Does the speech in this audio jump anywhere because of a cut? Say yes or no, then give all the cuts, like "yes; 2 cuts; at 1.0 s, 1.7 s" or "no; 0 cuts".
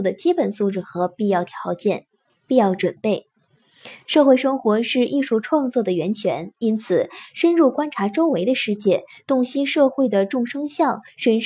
yes; 1 cut; at 4.1 s